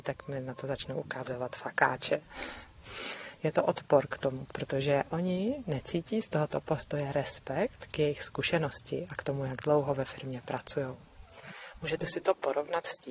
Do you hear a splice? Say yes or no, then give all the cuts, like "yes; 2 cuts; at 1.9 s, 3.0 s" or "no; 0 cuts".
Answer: no; 0 cuts